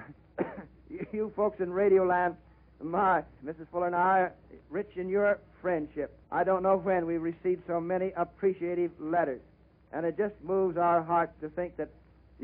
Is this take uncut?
no; 2 cuts; at 3.4 s, 6.2 s

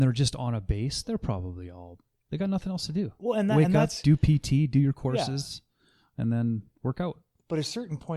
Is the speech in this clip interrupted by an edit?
no; 0 cuts

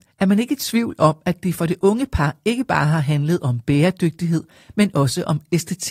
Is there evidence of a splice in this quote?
no; 0 cuts

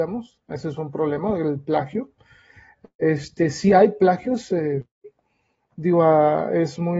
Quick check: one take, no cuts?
yes; 0 cuts

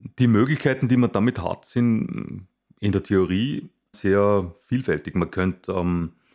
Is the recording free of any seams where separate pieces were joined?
no; 1 cut; at 3.9 s

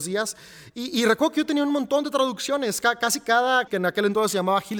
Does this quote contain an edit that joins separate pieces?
yes; 1 cut; at 3.7 s

